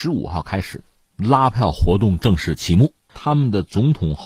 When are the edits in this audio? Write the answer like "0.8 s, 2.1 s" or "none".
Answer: 3.1 s